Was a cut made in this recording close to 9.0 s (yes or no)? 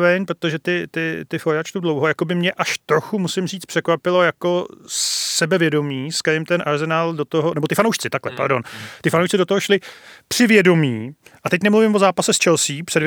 no